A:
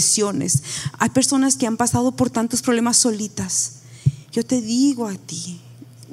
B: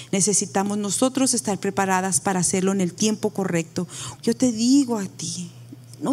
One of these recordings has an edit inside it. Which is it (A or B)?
B